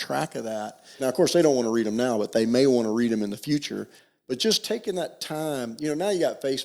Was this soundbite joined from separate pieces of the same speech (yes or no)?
yes